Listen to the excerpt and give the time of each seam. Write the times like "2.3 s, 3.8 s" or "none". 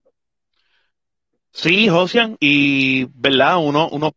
2.4 s